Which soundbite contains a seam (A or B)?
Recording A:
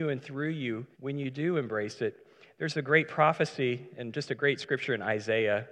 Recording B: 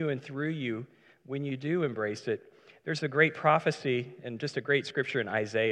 A